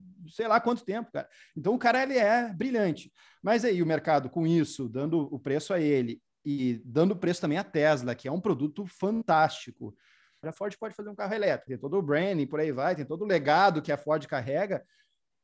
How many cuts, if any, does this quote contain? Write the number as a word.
two